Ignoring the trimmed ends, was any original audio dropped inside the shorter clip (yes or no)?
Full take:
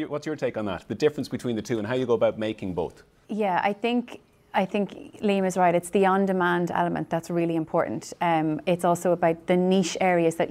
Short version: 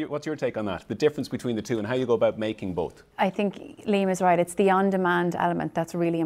yes